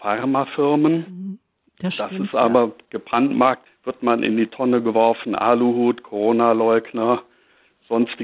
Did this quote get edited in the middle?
yes; 1 cut; at 3.7 s

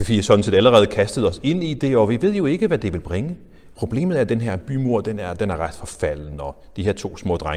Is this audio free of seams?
no; 1 cut; at 3.7 s

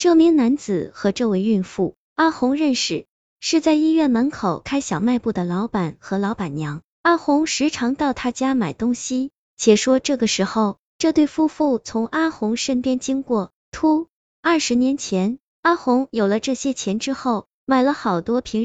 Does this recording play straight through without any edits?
no; 2 cuts; at 14.3 s, 15.6 s

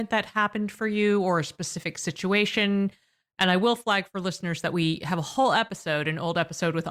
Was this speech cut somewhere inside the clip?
no; 0 cuts

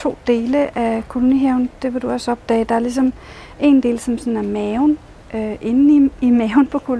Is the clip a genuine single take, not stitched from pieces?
yes; 0 cuts

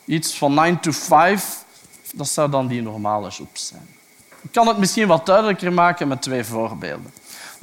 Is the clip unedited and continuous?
no; 1 cut; at 2.1 s

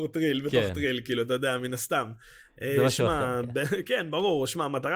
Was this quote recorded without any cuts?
yes; 0 cuts

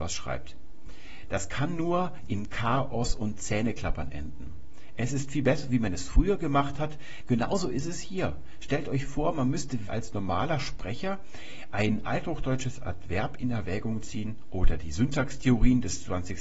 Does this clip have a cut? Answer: yes; 2 cuts; at 7.2 s, 9.9 s

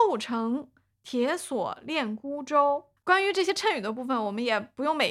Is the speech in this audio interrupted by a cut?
yes; 1 cut; at 3.0 s

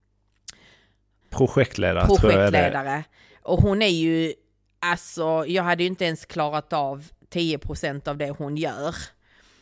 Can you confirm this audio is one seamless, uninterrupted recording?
no; 1 cut; at 1.2 s

